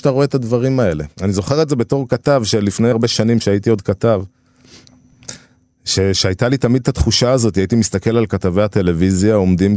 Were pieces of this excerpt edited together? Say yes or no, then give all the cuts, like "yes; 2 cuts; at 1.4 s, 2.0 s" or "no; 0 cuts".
yes; 1 cut; at 2.9 s